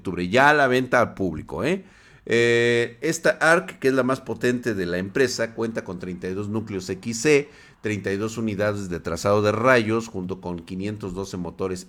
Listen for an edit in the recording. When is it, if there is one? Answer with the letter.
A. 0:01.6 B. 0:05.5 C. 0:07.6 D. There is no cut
D